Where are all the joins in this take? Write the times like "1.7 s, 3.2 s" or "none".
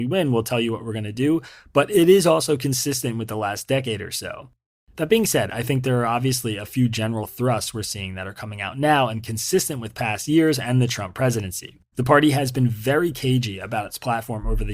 11.9 s